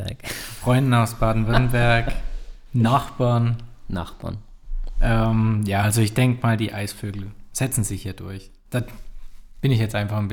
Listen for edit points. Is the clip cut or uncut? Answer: uncut